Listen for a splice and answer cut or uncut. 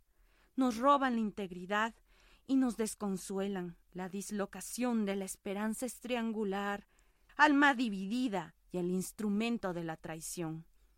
cut